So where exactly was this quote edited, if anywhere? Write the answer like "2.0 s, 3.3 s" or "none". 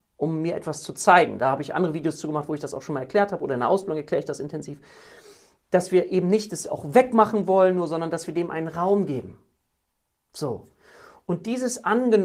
none